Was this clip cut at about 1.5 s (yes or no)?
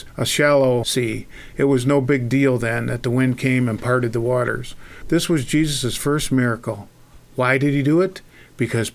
no